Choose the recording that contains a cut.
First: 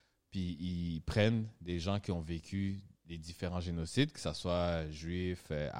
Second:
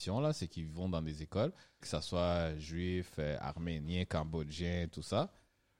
second; 1 cut; at 1.8 s

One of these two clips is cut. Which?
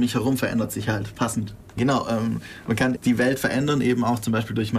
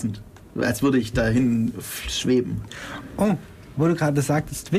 first; 2 cuts; at 1.8 s, 3.0 s

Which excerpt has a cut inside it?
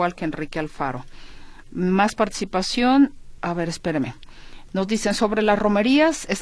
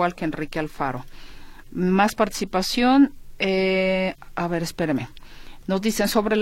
first; 1 cut; at 3.4 s

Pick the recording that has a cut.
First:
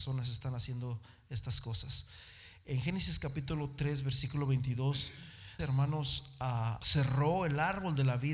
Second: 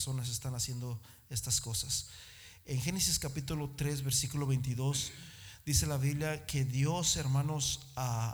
first; 2 cuts; at 5.6 s, 6.8 s

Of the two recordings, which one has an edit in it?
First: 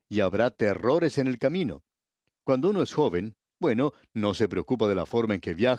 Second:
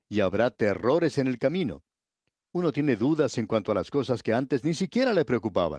first; 1 cut; at 2.4 s

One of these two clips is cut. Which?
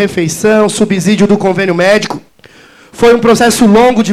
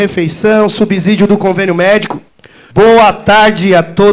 second; 1 cut; at 2.7 s

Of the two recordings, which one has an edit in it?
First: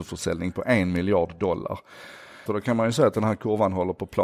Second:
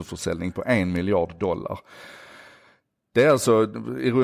first; 1 cut; at 2.5 s

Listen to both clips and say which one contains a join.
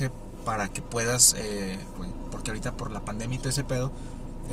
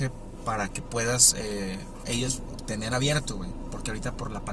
first; 1 cut; at 2.0 s

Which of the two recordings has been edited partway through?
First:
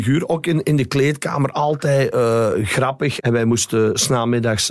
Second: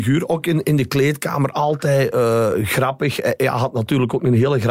first; 1 cut; at 3.2 s

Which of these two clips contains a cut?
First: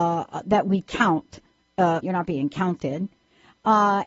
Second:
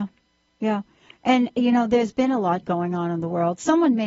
first; 1 cut; at 2.0 s

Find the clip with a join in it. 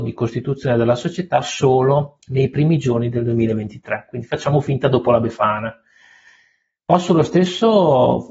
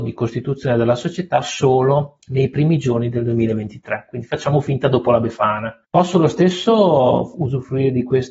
second; 1 cut; at 5.8 s

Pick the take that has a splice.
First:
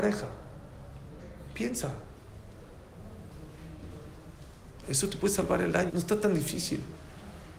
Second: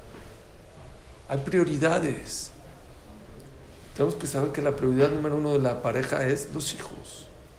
first; 2 cuts; at 4.8 s, 5.9 s

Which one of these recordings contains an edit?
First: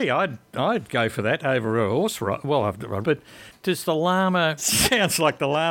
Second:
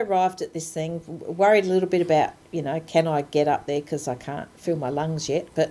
first; 2 cuts; at 3.0 s, 4.6 s

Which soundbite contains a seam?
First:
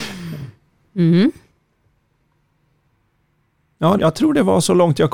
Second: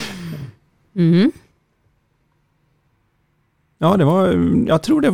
first; 1 cut; at 4.0 s

